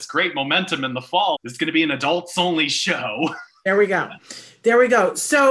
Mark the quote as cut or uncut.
cut